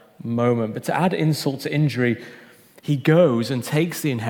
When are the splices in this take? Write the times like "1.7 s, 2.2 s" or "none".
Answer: none